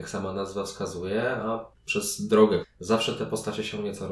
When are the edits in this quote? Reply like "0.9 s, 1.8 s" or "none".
2.6 s